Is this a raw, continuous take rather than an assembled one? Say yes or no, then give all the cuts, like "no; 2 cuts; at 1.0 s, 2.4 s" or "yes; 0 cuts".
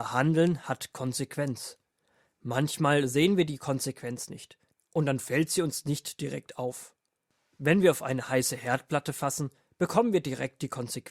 yes; 0 cuts